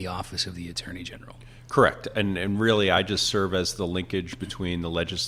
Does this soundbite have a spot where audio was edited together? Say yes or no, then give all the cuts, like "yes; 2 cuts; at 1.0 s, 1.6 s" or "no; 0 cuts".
no; 0 cuts